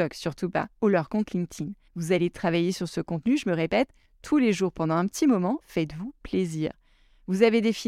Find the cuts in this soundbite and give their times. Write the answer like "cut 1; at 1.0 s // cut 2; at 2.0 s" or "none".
cut 1; at 1.9 s // cut 2; at 5.6 s